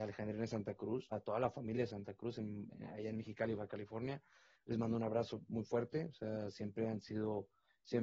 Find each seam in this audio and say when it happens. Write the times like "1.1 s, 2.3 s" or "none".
1.1 s, 4.6 s